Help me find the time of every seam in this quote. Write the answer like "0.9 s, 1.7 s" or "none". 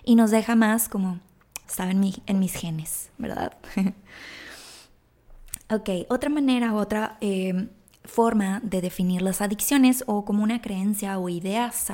1.6 s

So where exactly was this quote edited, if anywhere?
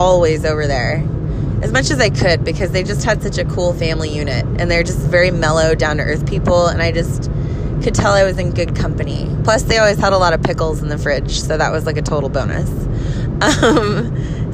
none

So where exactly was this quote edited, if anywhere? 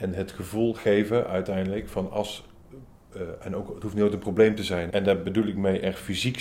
4.9 s

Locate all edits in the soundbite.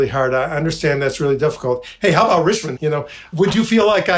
2.8 s

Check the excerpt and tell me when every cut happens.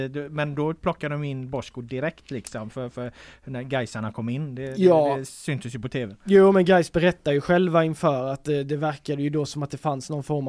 none

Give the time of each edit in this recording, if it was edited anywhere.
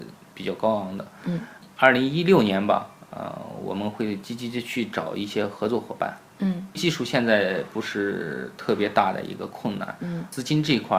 none

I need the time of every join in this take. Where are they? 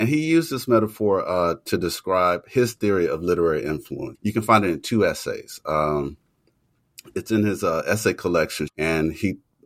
4.1 s, 8.7 s

